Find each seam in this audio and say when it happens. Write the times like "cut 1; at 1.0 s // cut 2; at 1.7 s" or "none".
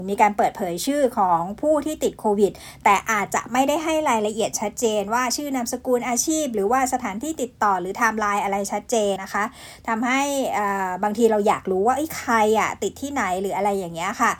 cut 1; at 9.2 s